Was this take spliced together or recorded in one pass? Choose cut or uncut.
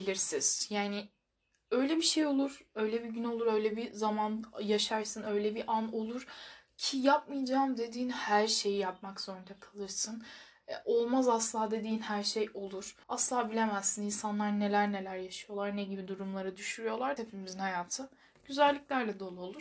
cut